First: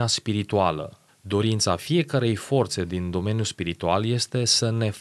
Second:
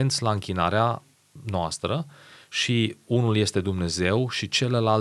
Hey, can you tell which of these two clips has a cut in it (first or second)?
first